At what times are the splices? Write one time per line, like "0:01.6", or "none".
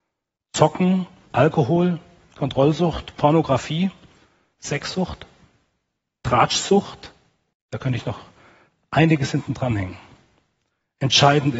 0:07.5